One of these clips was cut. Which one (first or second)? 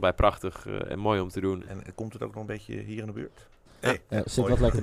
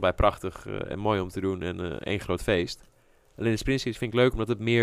first